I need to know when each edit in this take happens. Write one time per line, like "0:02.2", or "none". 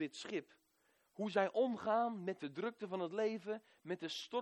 none